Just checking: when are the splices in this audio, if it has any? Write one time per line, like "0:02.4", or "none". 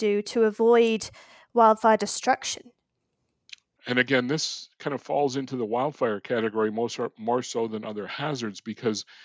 0:03.8